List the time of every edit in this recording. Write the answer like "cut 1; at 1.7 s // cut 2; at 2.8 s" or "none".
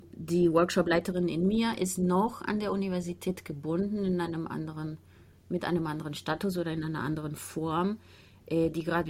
none